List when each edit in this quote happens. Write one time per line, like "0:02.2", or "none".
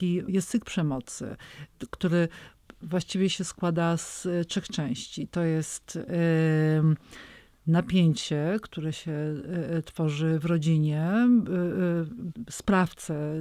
none